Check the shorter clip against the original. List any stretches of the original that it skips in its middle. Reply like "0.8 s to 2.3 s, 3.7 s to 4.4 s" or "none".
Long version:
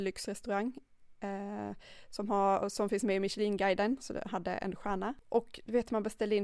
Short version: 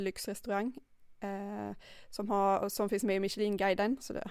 none